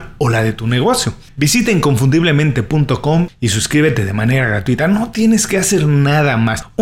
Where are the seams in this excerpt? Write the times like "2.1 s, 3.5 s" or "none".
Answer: none